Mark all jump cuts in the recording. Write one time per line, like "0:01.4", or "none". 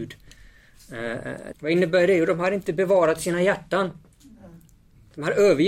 0:01.5